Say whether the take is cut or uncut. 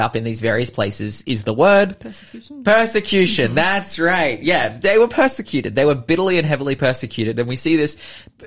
uncut